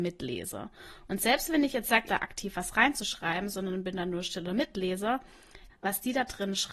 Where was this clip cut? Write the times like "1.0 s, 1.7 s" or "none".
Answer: 2.1 s, 5.7 s